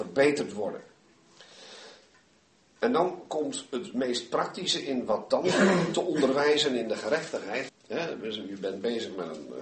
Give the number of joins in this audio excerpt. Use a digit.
1